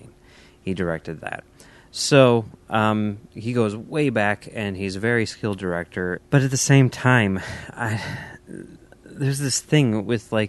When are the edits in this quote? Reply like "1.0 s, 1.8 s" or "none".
6.2 s

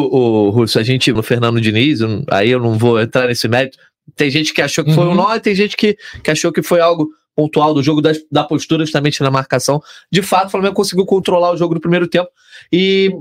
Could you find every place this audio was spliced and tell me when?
1.2 s

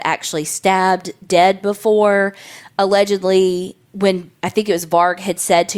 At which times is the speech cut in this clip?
2.6 s

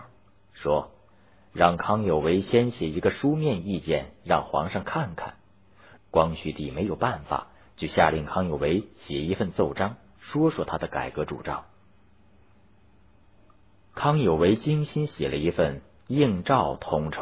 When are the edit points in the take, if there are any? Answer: 6.0 s

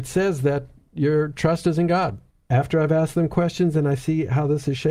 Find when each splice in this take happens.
2.3 s

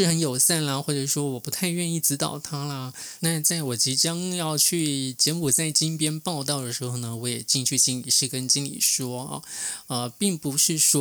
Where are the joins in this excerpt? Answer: 3.2 s

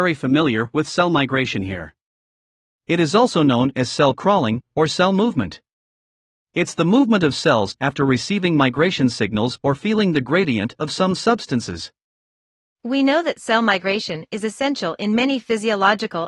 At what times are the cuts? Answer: none

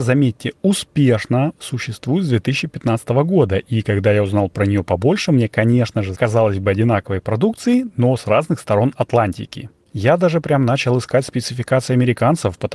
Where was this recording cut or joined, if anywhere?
6.1 s

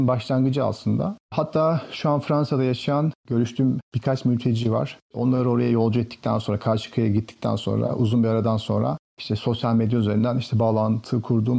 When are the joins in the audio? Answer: none

